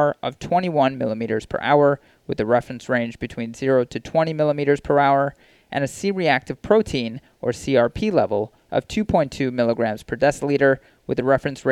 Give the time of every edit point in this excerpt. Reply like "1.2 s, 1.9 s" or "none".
none